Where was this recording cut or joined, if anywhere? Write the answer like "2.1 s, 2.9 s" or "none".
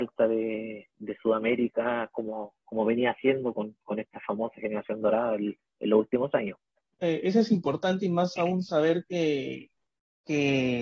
7.0 s